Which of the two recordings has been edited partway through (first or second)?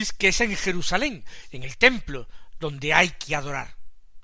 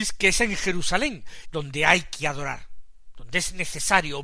second